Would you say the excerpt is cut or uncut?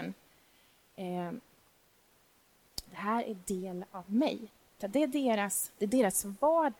cut